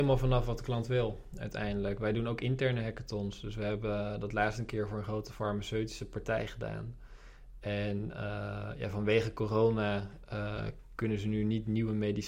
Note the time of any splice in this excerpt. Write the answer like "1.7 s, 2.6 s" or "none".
none